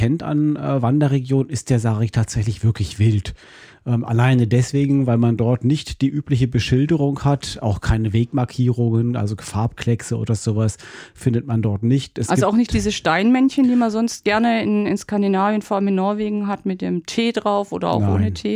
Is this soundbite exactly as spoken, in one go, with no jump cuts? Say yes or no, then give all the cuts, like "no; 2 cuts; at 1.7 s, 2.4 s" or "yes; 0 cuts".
yes; 0 cuts